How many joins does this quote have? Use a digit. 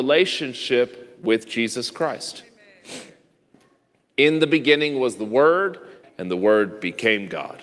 1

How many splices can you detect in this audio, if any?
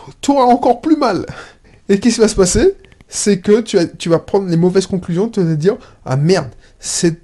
0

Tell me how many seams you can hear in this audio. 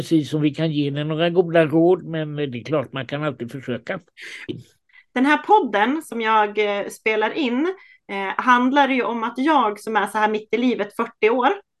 1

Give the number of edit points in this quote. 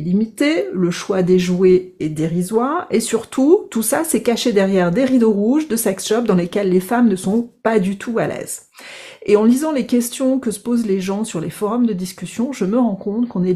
0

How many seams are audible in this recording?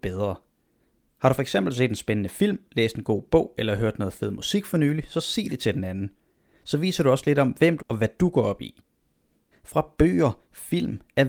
2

